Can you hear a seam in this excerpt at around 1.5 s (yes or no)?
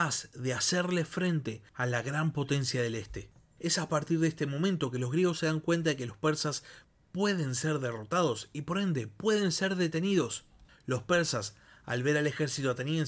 no